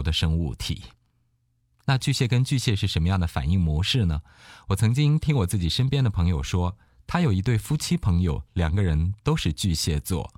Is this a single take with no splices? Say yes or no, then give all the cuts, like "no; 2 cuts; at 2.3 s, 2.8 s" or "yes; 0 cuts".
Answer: yes; 0 cuts